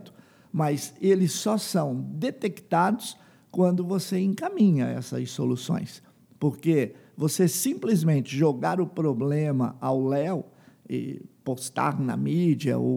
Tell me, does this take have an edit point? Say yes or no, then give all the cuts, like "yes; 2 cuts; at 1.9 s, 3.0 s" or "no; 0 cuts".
no; 0 cuts